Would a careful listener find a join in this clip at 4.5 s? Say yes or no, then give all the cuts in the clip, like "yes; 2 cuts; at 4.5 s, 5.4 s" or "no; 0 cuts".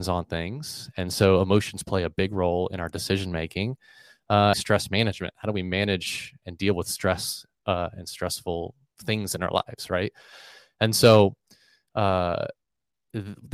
yes; 1 cut; at 4.5 s